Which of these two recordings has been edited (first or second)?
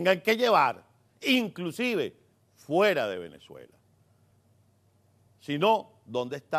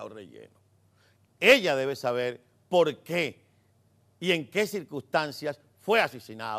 second